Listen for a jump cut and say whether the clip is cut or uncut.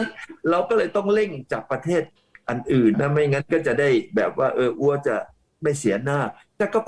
cut